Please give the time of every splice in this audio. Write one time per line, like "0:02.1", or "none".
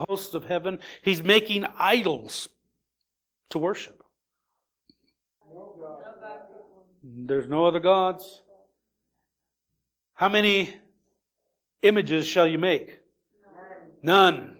0:05.4